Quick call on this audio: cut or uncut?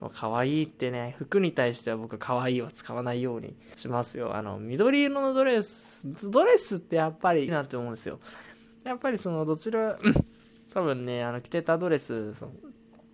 cut